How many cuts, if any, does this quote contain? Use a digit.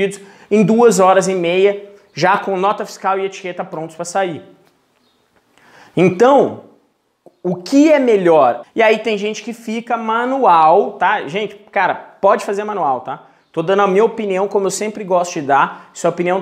1